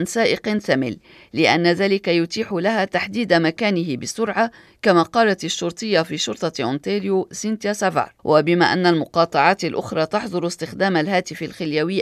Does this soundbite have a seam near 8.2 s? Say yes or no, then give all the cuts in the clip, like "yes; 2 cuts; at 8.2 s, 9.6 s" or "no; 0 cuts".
yes; 1 cut; at 8.2 s